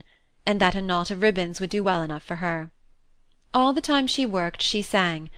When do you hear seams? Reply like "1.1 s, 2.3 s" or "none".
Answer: none